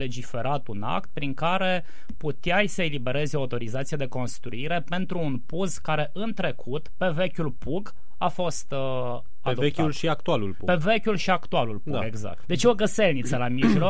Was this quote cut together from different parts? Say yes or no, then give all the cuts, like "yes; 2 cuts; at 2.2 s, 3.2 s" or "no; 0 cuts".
no; 0 cuts